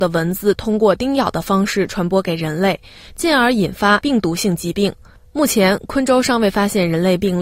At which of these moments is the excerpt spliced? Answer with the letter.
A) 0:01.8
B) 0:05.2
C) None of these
B